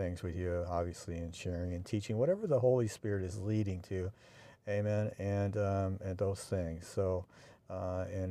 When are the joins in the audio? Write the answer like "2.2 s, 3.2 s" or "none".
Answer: none